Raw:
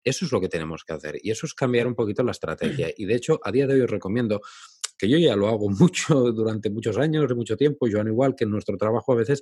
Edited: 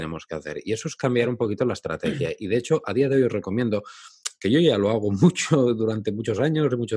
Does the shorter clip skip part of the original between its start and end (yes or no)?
no